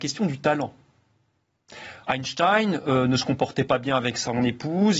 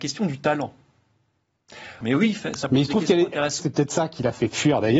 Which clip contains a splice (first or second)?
second